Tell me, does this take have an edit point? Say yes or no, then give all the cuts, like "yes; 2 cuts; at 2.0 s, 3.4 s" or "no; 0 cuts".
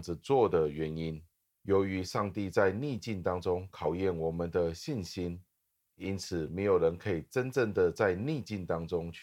yes; 1 cut; at 1.5 s